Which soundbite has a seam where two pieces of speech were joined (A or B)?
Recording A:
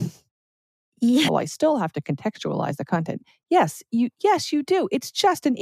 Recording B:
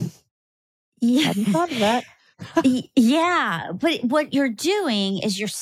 A